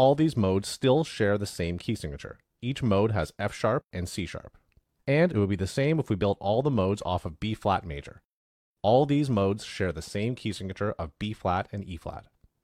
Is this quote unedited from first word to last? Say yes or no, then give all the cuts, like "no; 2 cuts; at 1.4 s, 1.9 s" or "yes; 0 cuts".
yes; 0 cuts